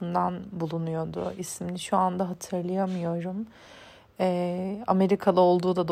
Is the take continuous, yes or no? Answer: yes